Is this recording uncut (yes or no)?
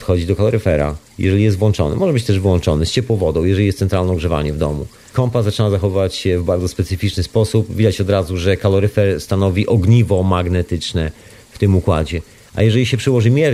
yes